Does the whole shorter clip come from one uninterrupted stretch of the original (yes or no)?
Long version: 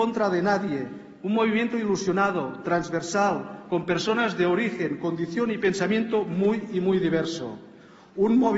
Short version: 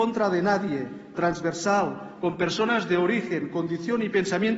no